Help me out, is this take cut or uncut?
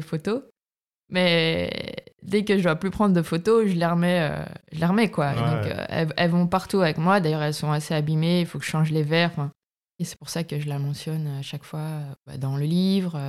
cut